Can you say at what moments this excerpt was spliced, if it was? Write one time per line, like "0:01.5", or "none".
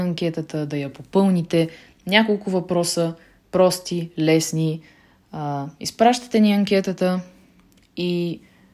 none